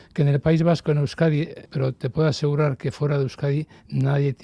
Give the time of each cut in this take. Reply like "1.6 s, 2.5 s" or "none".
1.7 s